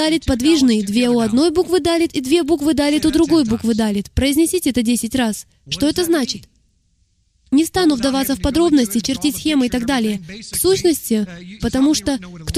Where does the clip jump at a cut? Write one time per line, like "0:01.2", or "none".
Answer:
0:11.6